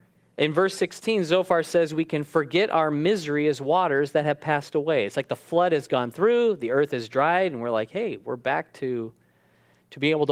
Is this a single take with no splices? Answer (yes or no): yes